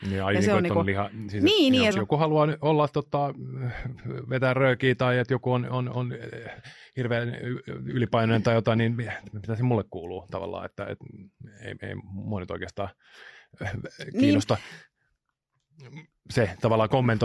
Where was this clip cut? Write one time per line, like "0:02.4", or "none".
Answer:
0:01.9